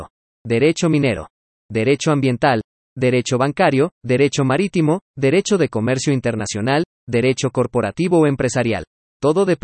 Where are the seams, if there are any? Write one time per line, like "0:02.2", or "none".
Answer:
0:04.0